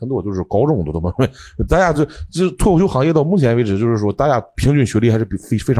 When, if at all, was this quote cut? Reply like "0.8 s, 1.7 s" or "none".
none